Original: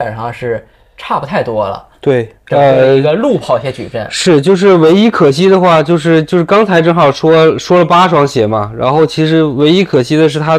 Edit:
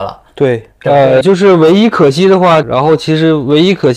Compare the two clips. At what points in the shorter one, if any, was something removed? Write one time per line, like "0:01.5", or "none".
0:01.2
0:02.6